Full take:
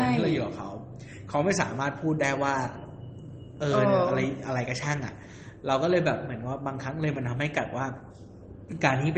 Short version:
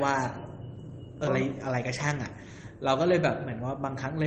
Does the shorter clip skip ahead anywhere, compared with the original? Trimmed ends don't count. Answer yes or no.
yes